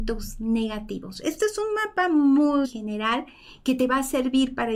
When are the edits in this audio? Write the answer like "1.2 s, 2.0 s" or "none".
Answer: 2.6 s